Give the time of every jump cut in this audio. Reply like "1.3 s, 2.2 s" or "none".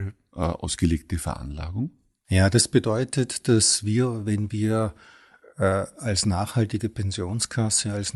none

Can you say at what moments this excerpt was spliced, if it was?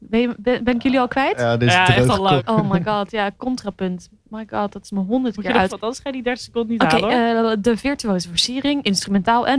2.4 s, 5.7 s

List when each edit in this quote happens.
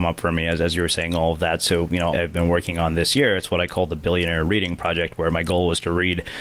2.1 s

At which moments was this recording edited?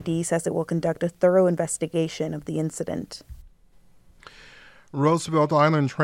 none

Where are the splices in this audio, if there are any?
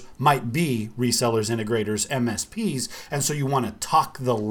none

